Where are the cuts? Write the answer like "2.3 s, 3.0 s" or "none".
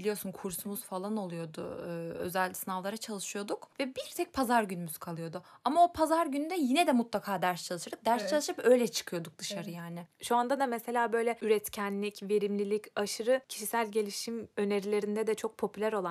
none